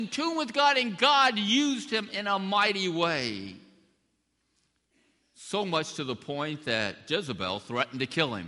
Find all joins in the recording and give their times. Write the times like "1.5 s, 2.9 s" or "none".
none